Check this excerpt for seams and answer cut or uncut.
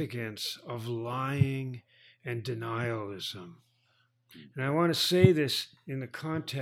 uncut